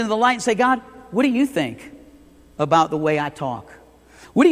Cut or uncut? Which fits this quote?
uncut